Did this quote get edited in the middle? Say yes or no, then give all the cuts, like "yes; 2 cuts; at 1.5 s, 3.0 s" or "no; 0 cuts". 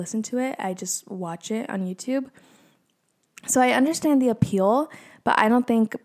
no; 0 cuts